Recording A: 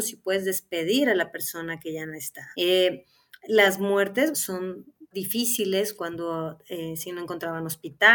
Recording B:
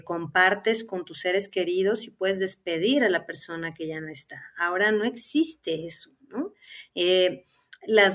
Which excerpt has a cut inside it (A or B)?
A